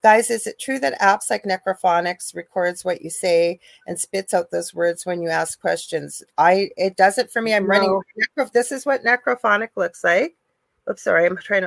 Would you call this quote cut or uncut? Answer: uncut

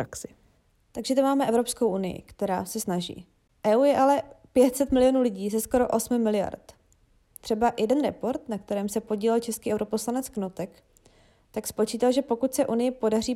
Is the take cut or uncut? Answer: uncut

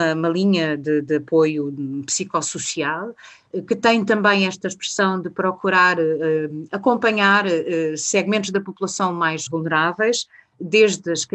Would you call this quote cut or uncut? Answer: cut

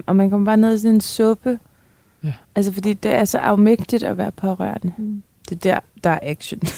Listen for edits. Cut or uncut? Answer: cut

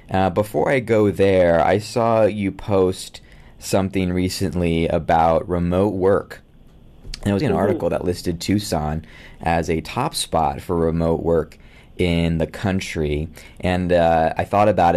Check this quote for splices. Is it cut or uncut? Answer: cut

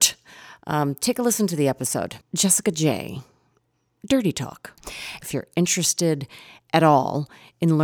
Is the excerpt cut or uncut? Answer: cut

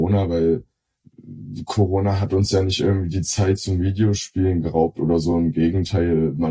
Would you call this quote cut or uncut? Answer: uncut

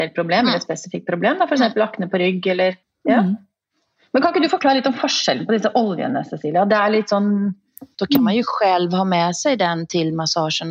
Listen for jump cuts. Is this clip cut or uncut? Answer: cut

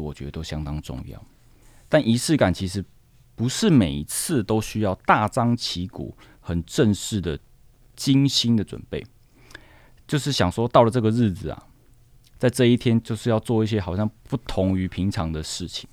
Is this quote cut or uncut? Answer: uncut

